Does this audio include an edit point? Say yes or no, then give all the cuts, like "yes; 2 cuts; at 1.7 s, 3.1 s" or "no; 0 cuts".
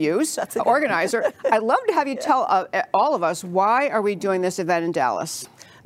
no; 0 cuts